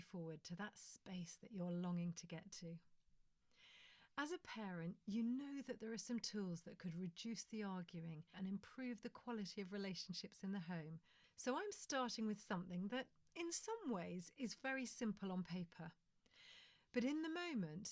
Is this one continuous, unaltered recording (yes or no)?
no